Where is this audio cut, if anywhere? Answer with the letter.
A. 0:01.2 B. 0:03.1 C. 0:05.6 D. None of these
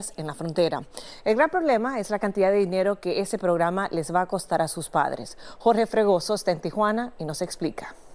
D